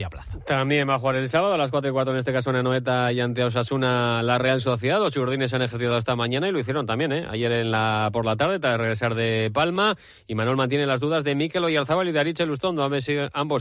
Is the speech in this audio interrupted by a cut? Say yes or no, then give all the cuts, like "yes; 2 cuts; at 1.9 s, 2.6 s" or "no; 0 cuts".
no; 0 cuts